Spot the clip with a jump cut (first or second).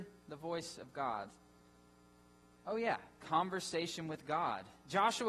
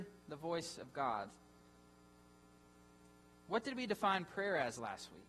first